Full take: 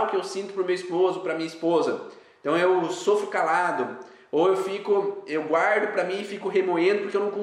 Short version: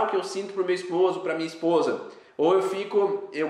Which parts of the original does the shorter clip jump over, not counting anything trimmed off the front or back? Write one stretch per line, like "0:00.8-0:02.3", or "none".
0:02.3-0:04.2